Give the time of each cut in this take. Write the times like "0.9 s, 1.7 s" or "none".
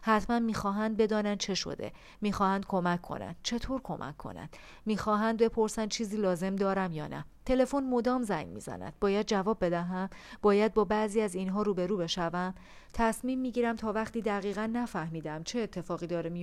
7.4 s